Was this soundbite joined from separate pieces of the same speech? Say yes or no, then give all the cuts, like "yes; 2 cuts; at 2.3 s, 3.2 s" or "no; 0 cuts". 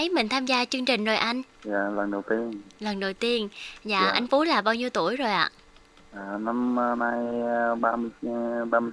no; 0 cuts